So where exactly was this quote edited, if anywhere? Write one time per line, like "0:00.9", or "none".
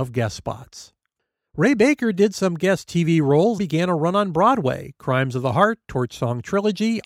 0:03.6